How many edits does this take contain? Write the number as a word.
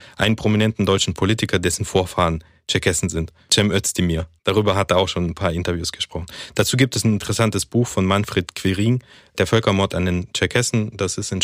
one